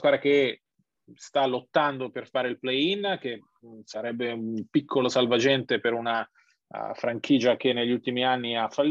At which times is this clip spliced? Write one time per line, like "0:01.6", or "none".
none